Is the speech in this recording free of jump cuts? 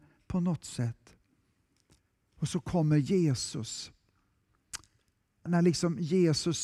no; 1 cut; at 5.5 s

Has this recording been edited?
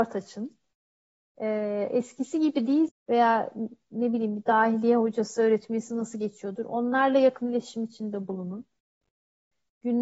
yes; 1 cut; at 2.9 s

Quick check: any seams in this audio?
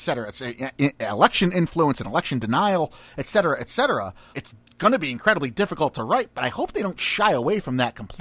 yes; 1 cut; at 4.3 s

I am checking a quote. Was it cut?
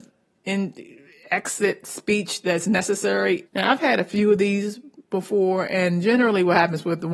yes; 1 cut; at 3.5 s

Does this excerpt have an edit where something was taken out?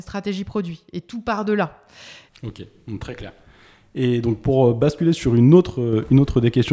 yes; 1 cut; at 2.3 s

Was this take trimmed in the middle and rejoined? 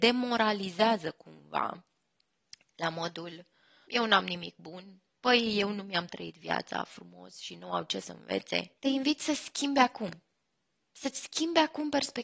yes; 2 cuts; at 3.8 s, 8.8 s

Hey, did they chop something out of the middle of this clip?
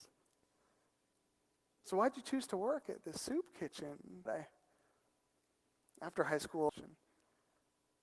yes; 2 cuts; at 4.3 s, 6.7 s

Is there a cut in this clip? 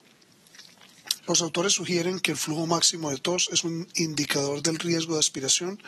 yes; 1 cut; at 1.2 s

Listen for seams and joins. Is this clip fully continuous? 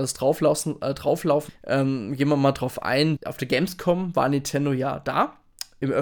no; 2 cuts; at 1.5 s, 3.2 s

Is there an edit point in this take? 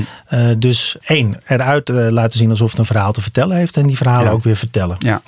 no; 0 cuts

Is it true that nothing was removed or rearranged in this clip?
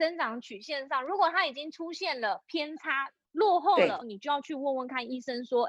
no; 1 cut; at 4.0 s

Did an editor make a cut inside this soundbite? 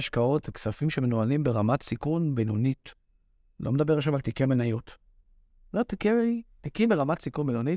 no; 0 cuts

